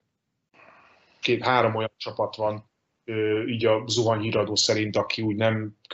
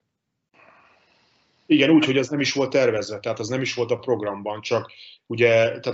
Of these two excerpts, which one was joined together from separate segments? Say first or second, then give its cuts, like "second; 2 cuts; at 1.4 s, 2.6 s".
first; 1 cut; at 1.2 s